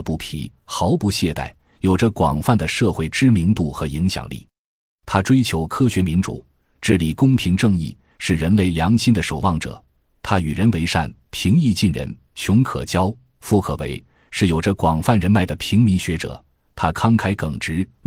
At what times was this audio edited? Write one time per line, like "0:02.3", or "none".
none